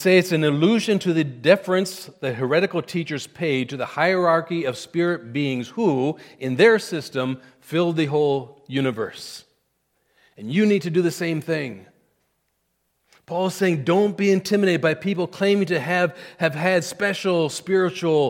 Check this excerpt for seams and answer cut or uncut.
cut